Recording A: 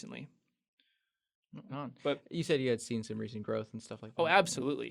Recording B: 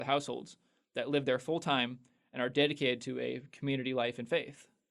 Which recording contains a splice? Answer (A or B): A